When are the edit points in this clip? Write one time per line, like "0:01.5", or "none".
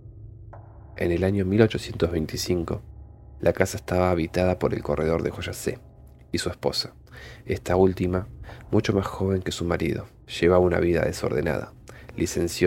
none